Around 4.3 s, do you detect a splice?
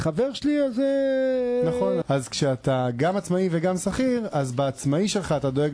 no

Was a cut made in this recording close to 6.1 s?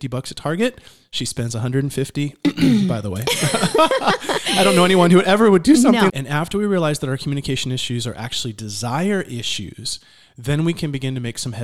yes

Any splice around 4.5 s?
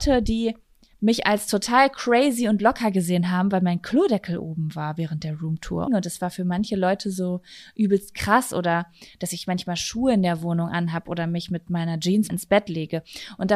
no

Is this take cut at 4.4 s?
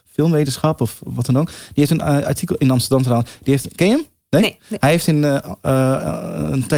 no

